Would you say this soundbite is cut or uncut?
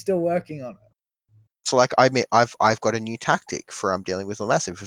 cut